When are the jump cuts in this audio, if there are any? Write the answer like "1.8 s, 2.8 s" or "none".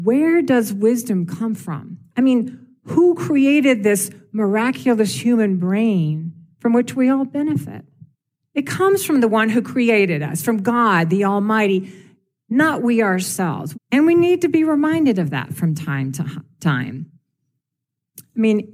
13.7 s